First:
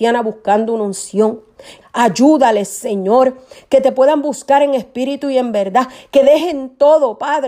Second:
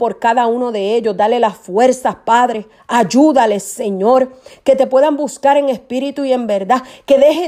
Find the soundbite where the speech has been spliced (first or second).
first